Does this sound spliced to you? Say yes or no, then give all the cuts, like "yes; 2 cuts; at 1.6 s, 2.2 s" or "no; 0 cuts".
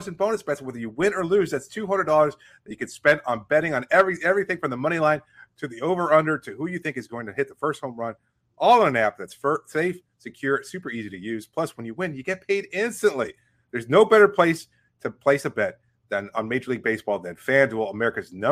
no; 0 cuts